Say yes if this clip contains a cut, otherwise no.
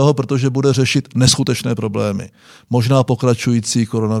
no